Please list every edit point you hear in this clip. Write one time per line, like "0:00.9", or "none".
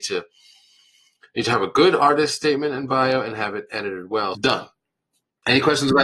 0:04.3